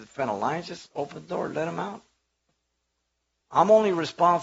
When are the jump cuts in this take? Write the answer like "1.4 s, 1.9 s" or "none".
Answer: 3.5 s